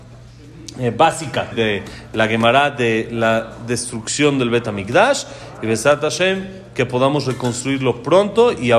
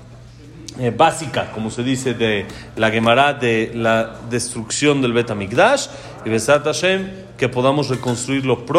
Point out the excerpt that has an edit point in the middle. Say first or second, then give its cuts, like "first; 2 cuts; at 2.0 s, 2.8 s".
first; 1 cut; at 1.5 s